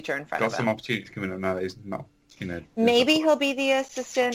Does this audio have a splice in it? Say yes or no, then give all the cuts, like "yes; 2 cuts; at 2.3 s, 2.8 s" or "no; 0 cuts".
no; 0 cuts